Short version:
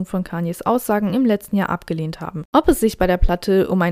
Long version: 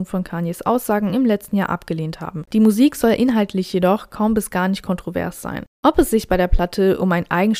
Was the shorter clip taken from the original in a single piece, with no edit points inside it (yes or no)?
no